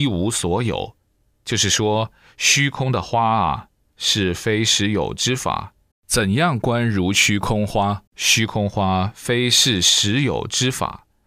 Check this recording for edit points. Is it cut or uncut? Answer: cut